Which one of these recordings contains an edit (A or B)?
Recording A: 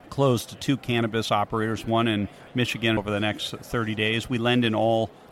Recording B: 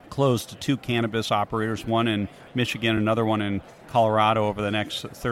A